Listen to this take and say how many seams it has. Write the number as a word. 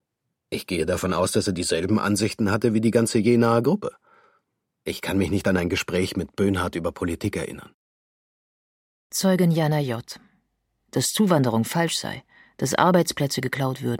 one